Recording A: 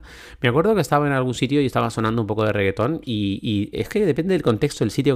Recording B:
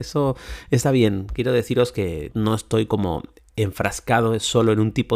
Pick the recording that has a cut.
B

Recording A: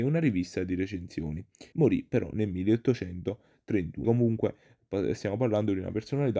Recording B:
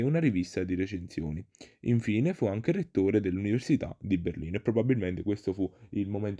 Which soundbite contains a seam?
A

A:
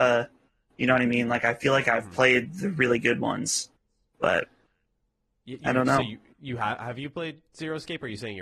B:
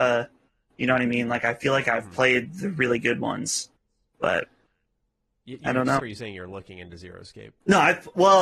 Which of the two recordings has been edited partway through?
B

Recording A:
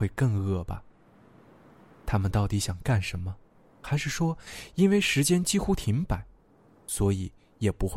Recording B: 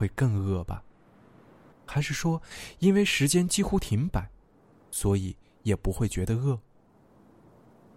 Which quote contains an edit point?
B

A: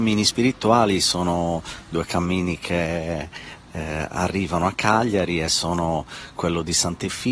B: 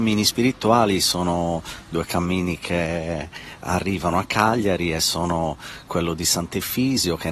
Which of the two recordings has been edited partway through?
B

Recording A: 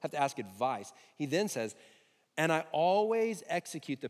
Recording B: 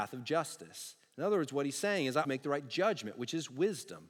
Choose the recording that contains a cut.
B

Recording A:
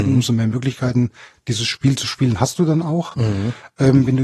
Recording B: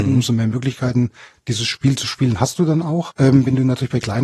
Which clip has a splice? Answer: B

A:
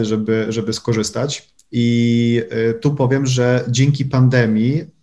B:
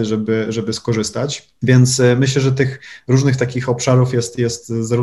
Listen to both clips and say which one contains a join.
A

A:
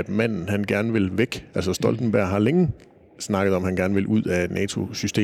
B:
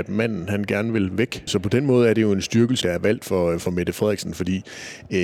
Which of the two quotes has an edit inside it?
B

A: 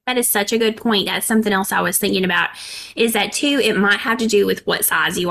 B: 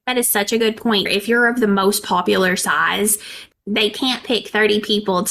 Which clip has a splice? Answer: B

